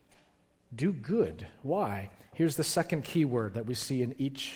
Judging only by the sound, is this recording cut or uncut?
uncut